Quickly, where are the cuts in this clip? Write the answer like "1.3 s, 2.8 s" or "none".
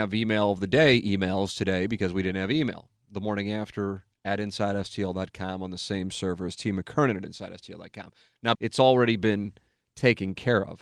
8.5 s